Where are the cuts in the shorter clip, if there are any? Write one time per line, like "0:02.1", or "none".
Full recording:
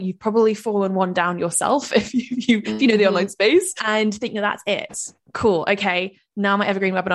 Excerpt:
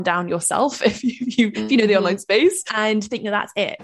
none